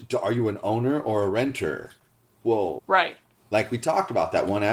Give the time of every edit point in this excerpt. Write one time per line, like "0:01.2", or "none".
0:02.8